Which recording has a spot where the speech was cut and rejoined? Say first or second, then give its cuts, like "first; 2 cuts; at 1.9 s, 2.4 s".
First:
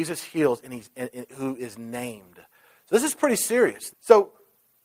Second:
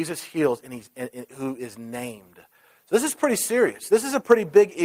first; 1 cut; at 3.9 s